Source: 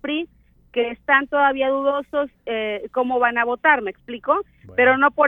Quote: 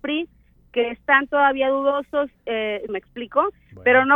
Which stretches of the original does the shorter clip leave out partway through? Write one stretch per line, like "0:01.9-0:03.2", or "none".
0:02.9-0:03.8